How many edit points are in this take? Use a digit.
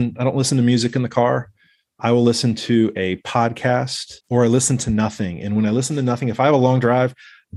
1